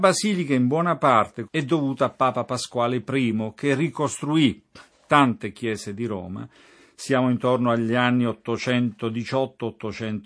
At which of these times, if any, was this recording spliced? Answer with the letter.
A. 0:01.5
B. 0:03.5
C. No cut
A